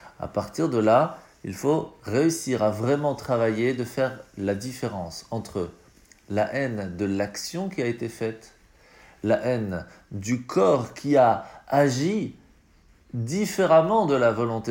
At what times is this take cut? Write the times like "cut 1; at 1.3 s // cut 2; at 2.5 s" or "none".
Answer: none